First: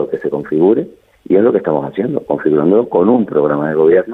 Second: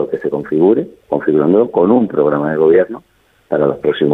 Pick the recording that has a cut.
second; 1 cut; at 1.1 s

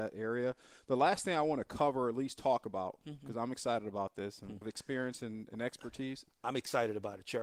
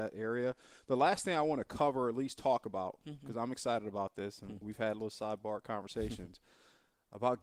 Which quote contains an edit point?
first; 1 cut; at 4.6 s

